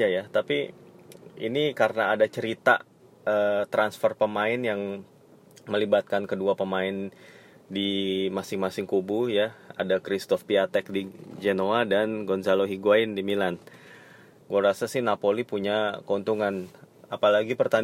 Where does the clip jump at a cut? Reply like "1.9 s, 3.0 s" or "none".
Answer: 14.4 s